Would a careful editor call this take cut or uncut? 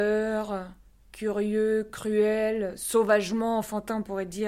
uncut